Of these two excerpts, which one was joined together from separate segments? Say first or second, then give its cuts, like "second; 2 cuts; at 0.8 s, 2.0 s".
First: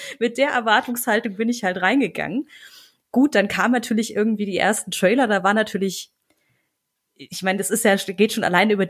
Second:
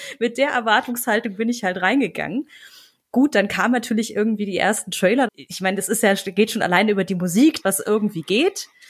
second; 2 cuts; at 5.3 s, 7.6 s